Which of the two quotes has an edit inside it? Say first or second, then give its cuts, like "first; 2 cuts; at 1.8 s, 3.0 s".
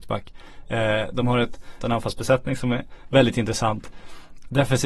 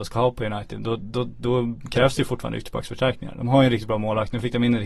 first; 1 cut; at 1.8 s